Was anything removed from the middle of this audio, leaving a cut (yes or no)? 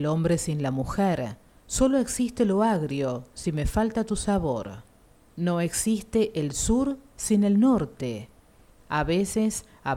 yes